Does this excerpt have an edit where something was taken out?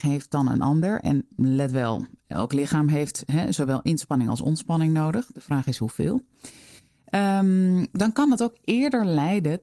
no; 0 cuts

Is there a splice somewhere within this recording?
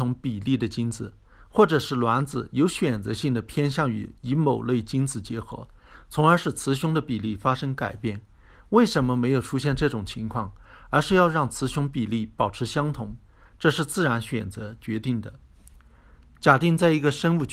no; 0 cuts

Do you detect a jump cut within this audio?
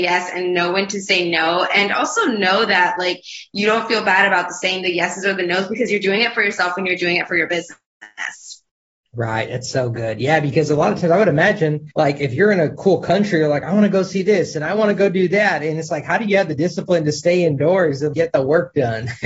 yes; 2 cuts; at 11.9 s, 18.1 s

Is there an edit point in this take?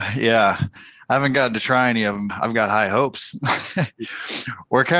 yes; 1 cut; at 2.3 s

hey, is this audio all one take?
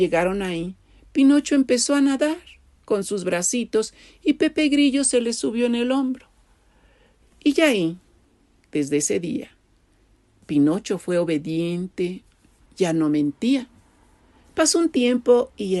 no; 2 cuts; at 7.2 s, 12.6 s

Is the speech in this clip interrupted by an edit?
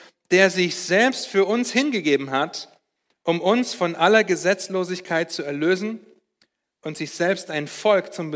no; 0 cuts

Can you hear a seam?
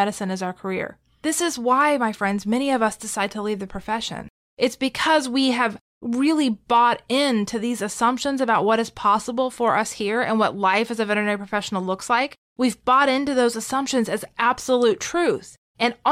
no; 0 cuts

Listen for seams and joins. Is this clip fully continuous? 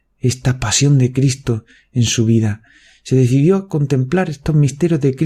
yes; 0 cuts

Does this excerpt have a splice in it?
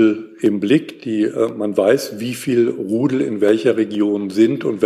no; 0 cuts

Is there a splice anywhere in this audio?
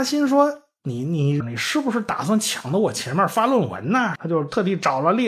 yes; 2 cuts; at 1.4 s, 4.1 s

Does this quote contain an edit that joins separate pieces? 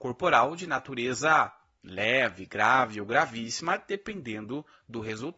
no; 0 cuts

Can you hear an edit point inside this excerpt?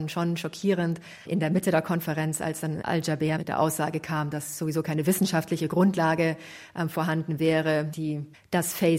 no; 0 cuts

